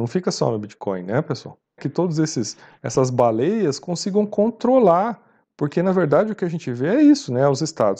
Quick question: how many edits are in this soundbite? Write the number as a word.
one